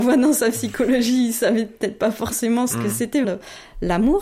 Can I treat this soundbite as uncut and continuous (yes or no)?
no